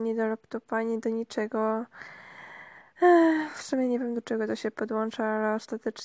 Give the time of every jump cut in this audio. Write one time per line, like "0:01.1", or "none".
none